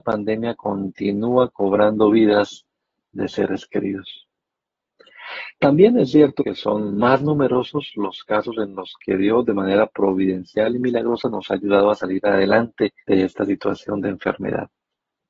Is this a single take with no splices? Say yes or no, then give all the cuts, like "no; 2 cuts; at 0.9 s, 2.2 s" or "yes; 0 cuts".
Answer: no; 2 cuts; at 6.4 s, 13.0 s